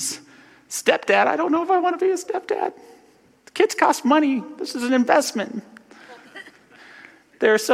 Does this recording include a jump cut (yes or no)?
yes